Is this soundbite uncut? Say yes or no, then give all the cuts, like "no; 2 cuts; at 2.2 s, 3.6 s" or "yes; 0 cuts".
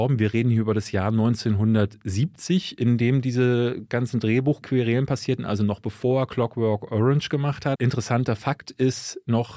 no; 1 cut; at 7.7 s